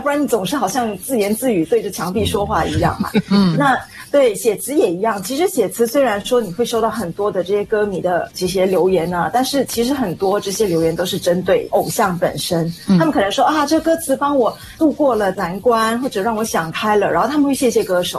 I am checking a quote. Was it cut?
no; 0 cuts

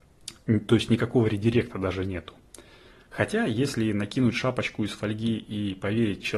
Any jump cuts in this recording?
yes; 1 cut; at 2.9 s

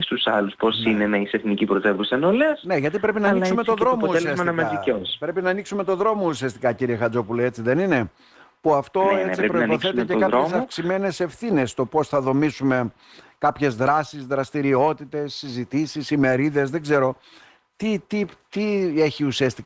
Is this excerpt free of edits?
yes; 0 cuts

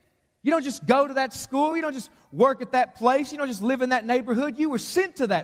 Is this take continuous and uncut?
yes; 0 cuts

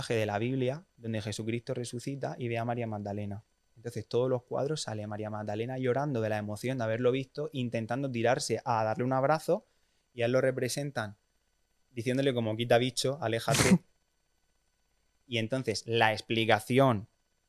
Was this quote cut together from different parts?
no; 0 cuts

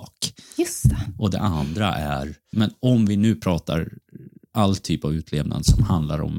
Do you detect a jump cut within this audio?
yes; 1 cut; at 2.5 s

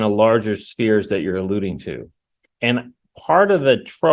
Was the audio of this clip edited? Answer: no; 0 cuts

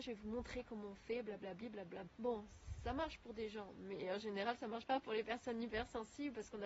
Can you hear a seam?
yes; 1 cut; at 2.1 s

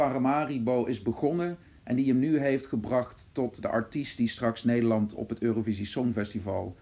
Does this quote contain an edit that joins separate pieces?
no; 0 cuts

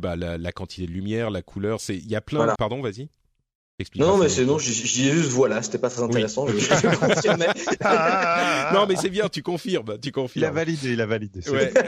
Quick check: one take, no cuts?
no; 1 cut; at 2.5 s

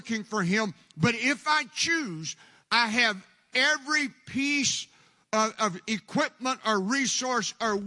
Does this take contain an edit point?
no; 0 cuts

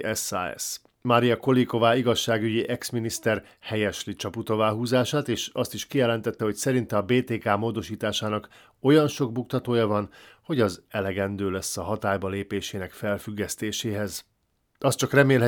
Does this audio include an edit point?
no; 0 cuts

